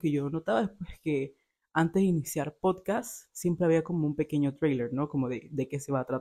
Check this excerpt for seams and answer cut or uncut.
uncut